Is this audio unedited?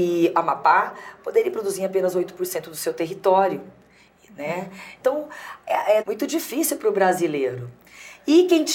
no; 2 cuts; at 5.0 s, 6.0 s

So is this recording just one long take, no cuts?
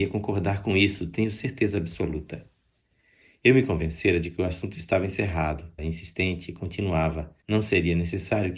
no; 2 cuts; at 5.8 s, 7.4 s

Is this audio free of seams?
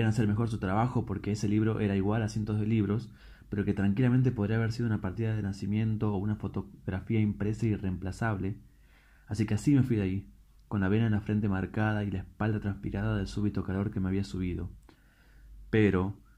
yes; 0 cuts

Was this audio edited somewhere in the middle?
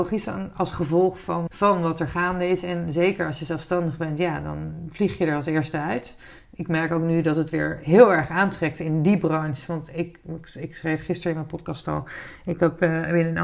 yes; 1 cut; at 1.5 s

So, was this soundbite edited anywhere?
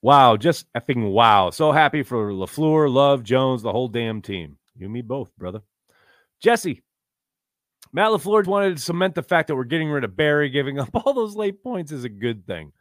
yes; 2 cuts; at 4.7 s, 8.4 s

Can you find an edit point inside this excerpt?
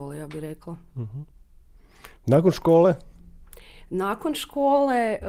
no; 0 cuts

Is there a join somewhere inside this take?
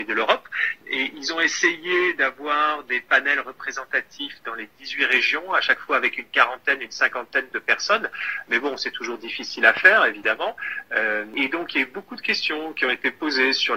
no; 0 cuts

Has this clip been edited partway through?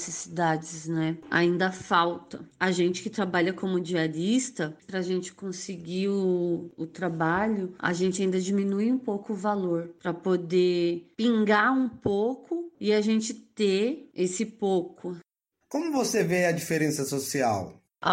yes; 2 cuts; at 4.8 s, 15.6 s

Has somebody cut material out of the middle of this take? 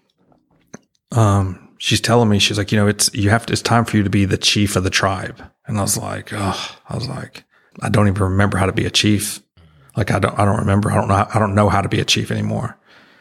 yes; 1 cut; at 7.7 s

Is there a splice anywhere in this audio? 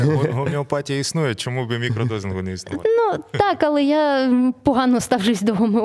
no; 0 cuts

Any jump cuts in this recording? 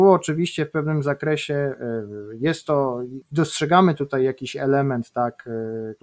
no; 0 cuts

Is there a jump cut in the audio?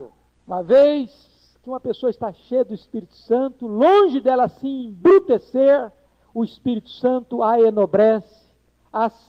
yes; 1 cut; at 6.1 s

